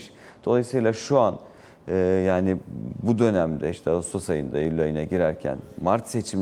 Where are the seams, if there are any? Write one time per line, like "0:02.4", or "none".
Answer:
none